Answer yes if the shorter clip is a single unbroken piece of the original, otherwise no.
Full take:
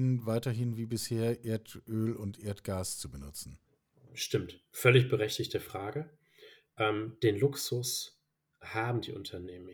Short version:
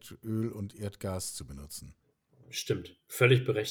yes